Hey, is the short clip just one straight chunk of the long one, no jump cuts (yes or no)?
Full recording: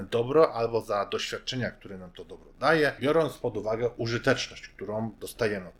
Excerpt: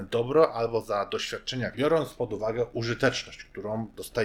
no